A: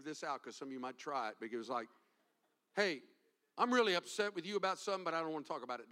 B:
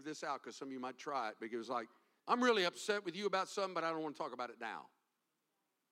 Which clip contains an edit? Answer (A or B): B